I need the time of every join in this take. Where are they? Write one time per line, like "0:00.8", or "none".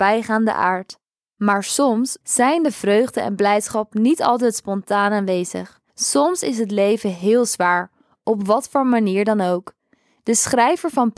0:02.2
0:05.9